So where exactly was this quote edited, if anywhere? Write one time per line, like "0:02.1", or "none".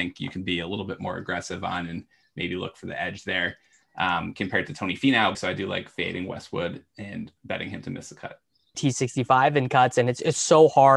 0:03.8
0:05.3
0:08.7